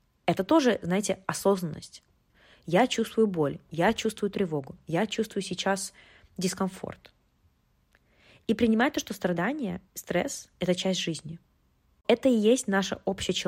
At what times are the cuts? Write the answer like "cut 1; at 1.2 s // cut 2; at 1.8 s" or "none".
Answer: none

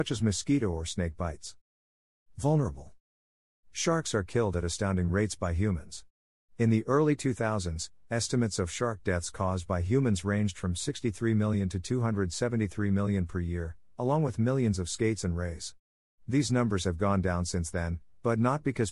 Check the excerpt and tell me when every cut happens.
none

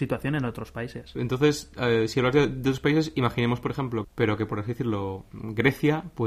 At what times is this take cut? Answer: cut 1; at 1.1 s // cut 2; at 4.0 s

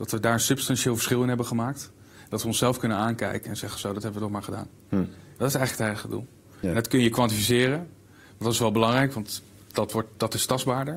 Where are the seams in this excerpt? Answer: none

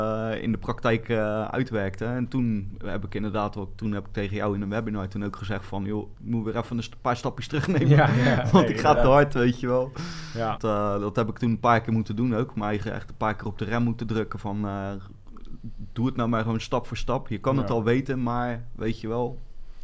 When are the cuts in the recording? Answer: cut 1; at 6.1 s // cut 2; at 10.6 s

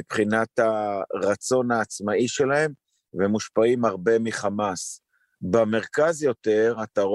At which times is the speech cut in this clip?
none

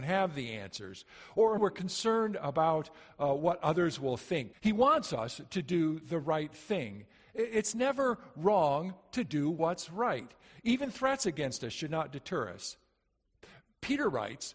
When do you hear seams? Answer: cut 1; at 1.6 s // cut 2; at 4.5 s

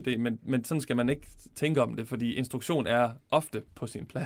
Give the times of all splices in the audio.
none

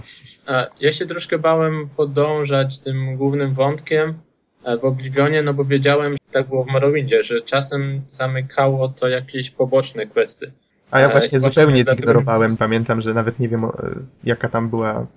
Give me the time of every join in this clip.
cut 1; at 6.2 s // cut 2; at 10.7 s // cut 3; at 12.6 s

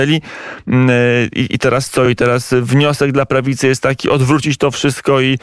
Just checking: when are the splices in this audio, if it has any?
none

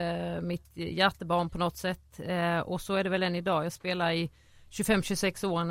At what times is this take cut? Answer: none

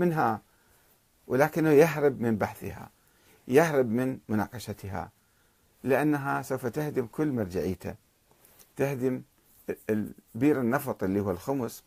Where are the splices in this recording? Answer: none

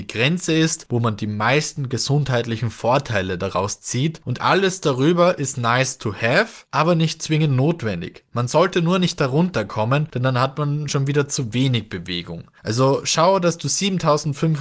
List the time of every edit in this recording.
none

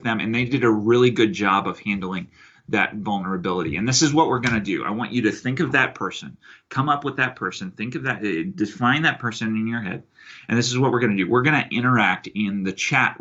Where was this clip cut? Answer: none

